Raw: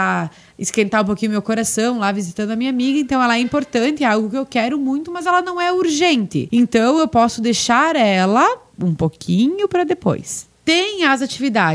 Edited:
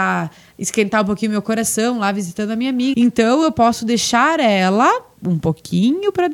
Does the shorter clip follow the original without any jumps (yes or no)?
no